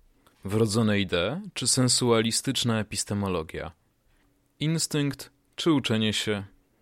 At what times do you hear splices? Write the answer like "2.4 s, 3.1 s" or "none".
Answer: none